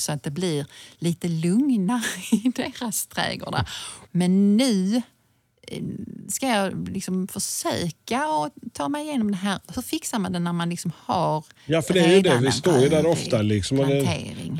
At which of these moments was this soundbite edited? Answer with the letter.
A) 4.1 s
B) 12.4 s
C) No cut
A